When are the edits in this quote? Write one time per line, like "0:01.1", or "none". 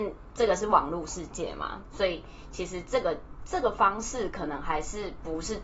0:01.8